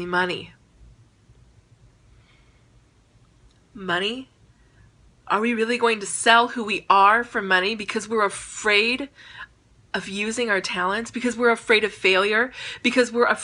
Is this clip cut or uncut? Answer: uncut